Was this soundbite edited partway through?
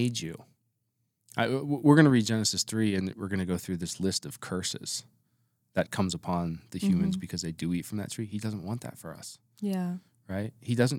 no; 0 cuts

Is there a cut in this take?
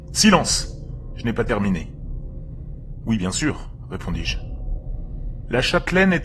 no; 0 cuts

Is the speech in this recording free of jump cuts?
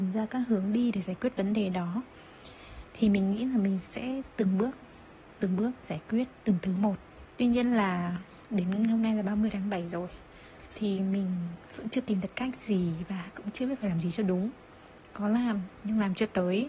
no; 1 cut; at 7.3 s

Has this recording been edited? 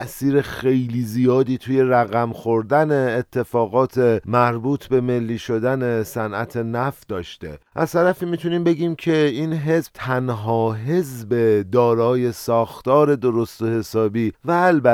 yes; 1 cut; at 7.7 s

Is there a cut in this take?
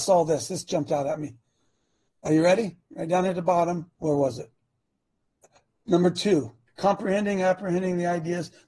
yes; 2 cuts; at 3.9 s, 6.7 s

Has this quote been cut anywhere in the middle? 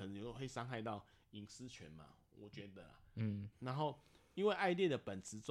yes; 1 cut; at 3.5 s

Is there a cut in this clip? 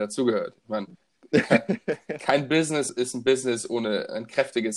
yes; 1 cut; at 2.9 s

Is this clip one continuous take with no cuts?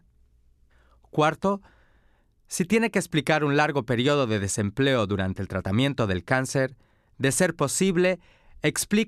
yes; 0 cuts

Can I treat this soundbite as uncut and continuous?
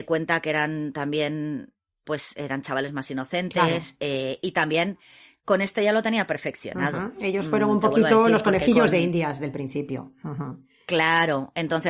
no; 1 cut; at 2.0 s

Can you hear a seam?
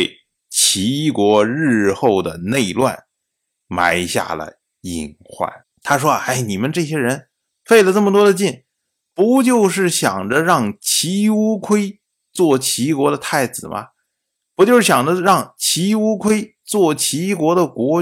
yes; 1 cut; at 5.6 s

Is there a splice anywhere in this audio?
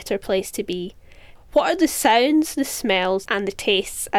yes; 2 cuts; at 1.4 s, 3.3 s

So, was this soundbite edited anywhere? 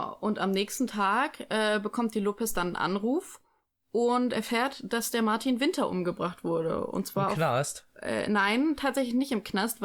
no; 0 cuts

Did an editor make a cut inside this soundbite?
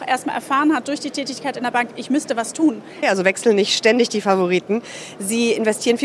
yes; 1 cut; at 3.0 s

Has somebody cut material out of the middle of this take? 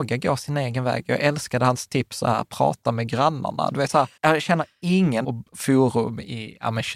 yes; 2 cuts; at 4.2 s, 5.2 s

